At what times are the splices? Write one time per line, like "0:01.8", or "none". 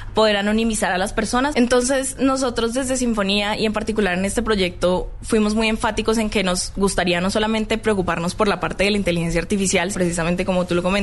0:01.5
0:09.9